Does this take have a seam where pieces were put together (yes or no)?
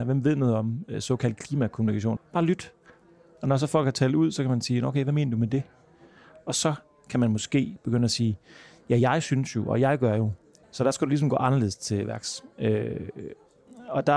yes